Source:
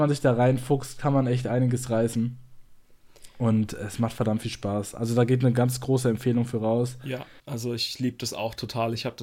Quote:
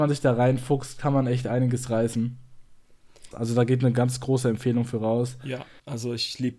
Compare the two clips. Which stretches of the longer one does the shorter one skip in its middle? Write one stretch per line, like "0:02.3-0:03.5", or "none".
0:03.3-0:04.9